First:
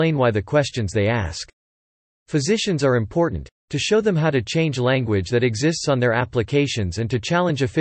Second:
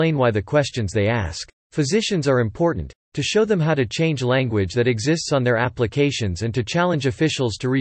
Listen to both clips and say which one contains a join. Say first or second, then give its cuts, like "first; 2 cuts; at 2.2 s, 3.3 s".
second; 1 cut; at 1.6 s